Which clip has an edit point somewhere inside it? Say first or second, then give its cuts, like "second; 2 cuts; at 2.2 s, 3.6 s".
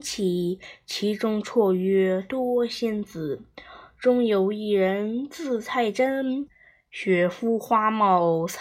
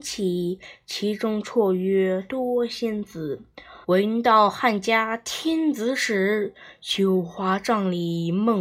second; 1 cut; at 3.8 s